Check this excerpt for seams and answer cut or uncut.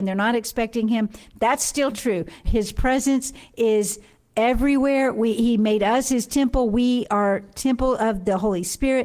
cut